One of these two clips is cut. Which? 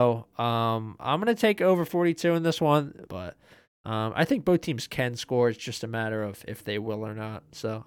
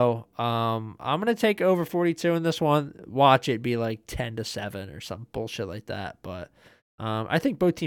first; 1 cut; at 3.1 s

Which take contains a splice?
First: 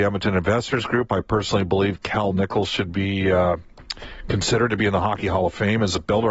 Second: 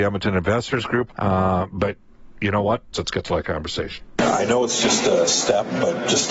second; 2 cuts; at 1.1 s, 2.9 s

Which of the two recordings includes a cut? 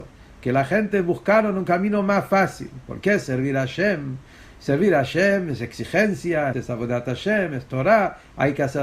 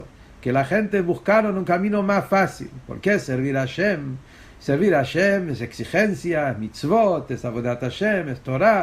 first; 1 cut; at 6.5 s

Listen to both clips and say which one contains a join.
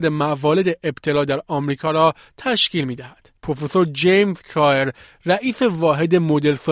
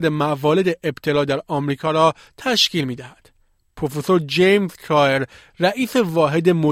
first; 1 cut; at 3.4 s

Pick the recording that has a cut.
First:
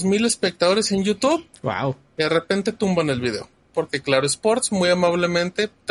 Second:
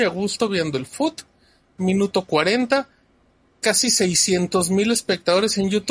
first; 1 cut; at 3.7 s

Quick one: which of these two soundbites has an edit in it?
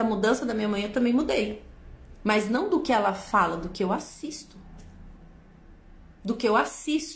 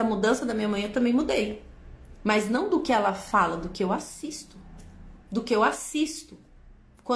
second; 1 cut; at 5.2 s

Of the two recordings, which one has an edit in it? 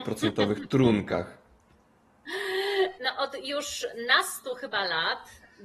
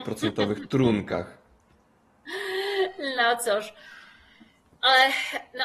first; 1 cut; at 2.9 s

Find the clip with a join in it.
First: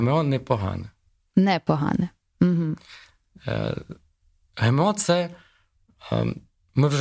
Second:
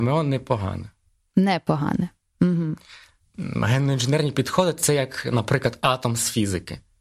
second; 1 cut; at 3.2 s

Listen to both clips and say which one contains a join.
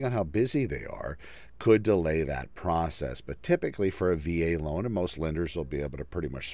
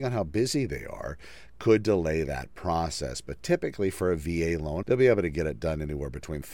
second; 1 cut; at 4.8 s

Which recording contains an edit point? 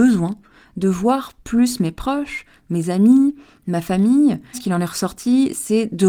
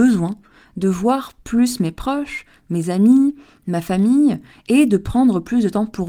first; 1 cut; at 4.5 s

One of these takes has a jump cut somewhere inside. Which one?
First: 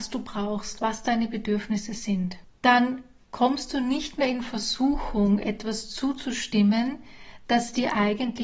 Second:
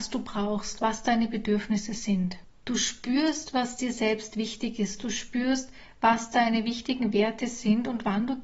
first; 1 cut; at 2.6 s

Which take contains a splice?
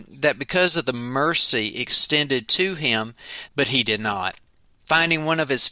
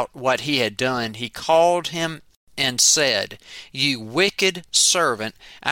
first; 1 cut; at 3.5 s

